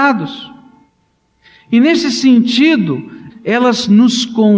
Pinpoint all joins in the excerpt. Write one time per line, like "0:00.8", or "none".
0:03.3